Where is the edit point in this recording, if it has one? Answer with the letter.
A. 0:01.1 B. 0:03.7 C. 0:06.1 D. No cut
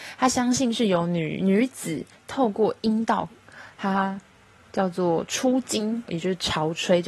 C